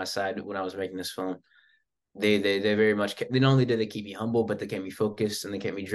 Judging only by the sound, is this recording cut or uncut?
uncut